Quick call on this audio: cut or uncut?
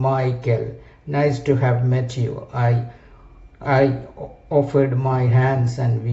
cut